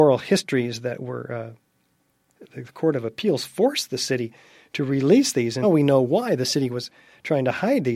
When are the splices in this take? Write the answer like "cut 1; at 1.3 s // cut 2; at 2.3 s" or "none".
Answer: cut 1; at 2.4 s // cut 2; at 5.6 s